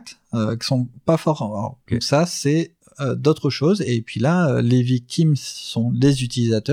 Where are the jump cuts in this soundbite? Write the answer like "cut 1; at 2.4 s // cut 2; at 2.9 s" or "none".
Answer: cut 1; at 1.9 s

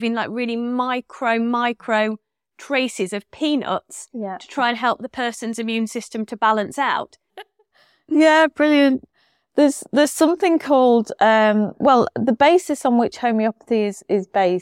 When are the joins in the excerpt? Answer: cut 1; at 7.3 s

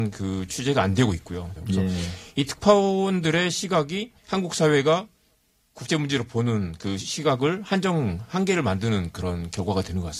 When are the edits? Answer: cut 1; at 1.6 s // cut 2; at 4.2 s

